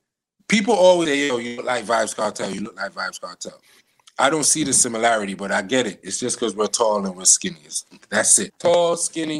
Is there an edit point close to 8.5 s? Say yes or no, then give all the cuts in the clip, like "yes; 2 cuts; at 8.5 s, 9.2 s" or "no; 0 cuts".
yes; 1 cut; at 8.5 s